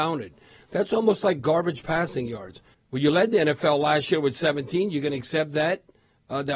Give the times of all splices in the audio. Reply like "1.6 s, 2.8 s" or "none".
2.7 s